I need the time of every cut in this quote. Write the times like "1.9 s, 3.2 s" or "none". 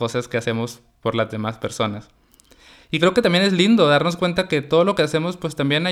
none

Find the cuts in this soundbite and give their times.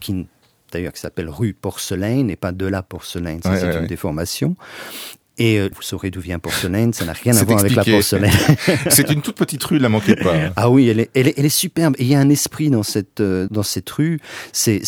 5.7 s, 13.5 s

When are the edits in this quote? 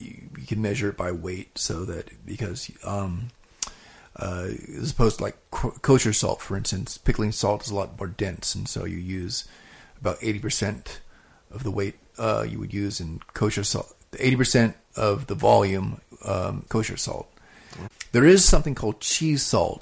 13.3 s, 14.8 s, 16.7 s

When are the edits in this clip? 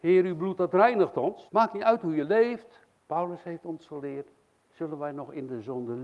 1.5 s, 3.0 s

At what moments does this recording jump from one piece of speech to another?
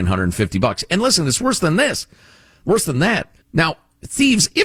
3.4 s

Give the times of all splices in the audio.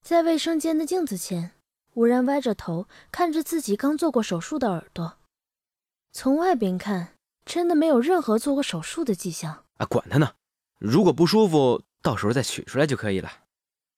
9.7 s

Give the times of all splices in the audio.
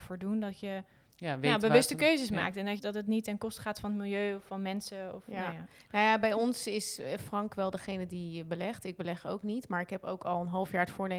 2.8 s

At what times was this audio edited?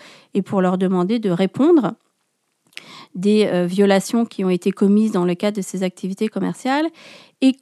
none

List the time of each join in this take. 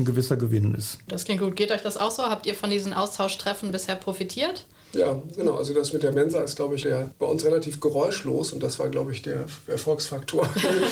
1.1 s, 6.8 s

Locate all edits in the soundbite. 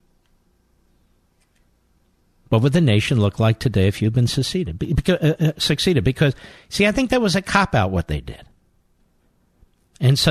none

